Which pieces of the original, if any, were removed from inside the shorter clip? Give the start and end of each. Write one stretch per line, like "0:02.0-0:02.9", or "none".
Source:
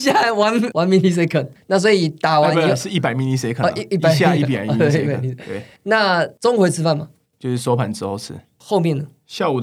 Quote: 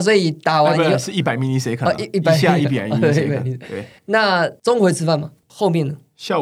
0:07.2-0:08.5